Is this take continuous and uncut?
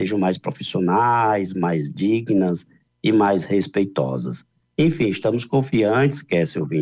yes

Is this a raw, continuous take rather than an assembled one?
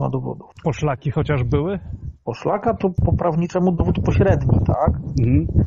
yes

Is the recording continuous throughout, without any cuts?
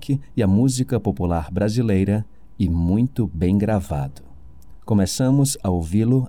yes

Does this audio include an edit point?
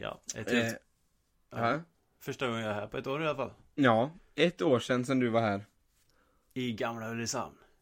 no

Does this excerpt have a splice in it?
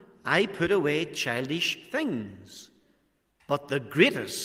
yes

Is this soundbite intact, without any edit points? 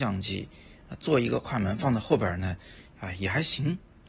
yes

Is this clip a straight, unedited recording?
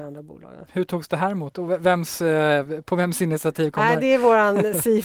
yes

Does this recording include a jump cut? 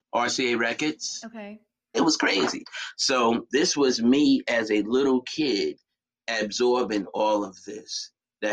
yes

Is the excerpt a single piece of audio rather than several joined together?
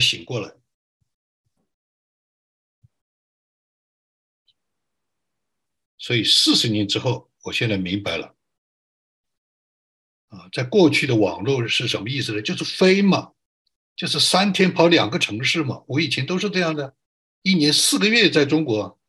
yes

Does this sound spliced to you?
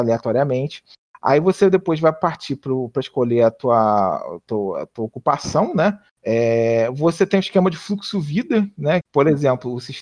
yes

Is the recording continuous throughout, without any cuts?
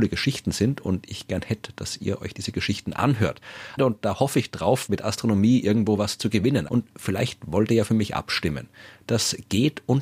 no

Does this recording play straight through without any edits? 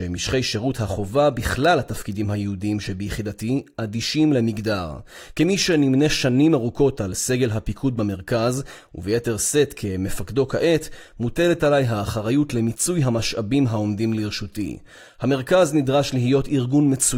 yes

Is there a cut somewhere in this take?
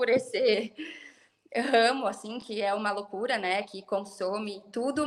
no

